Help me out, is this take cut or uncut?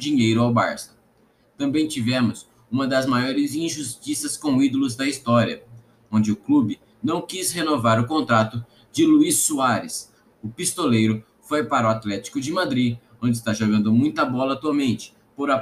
uncut